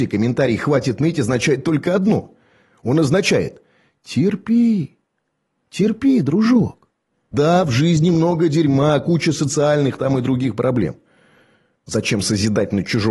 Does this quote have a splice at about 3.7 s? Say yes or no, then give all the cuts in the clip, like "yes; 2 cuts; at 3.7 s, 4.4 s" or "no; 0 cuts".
no; 2 cuts; at 7.3 s, 11.8 s